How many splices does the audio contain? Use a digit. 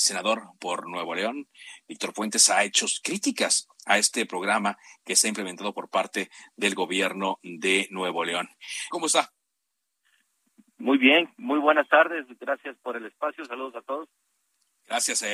1